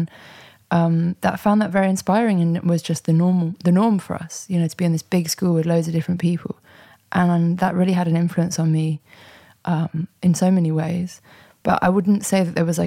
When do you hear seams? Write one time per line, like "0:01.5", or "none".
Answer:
none